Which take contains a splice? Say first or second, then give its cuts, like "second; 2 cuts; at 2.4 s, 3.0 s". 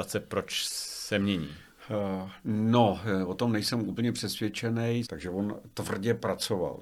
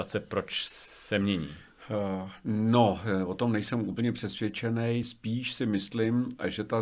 first; 1 cut; at 5.0 s